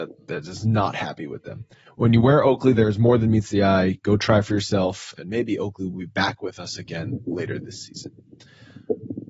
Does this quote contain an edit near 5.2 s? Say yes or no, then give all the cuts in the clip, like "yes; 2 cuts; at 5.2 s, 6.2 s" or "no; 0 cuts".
yes; 1 cut; at 5.2 s